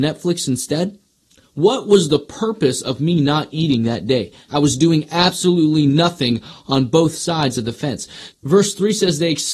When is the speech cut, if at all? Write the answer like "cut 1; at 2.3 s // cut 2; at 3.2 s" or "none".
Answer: cut 1; at 4.5 s // cut 2; at 8.3 s